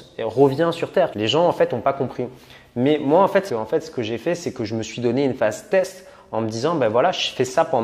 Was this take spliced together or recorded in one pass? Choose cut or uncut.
cut